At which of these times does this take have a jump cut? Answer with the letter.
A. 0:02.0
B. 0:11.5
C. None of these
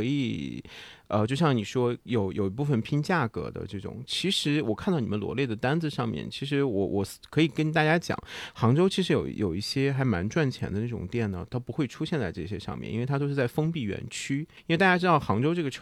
C